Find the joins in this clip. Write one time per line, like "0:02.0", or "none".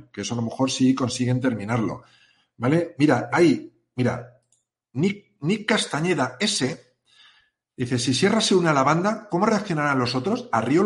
0:03.3